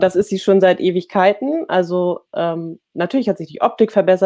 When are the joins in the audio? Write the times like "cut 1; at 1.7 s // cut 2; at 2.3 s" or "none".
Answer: none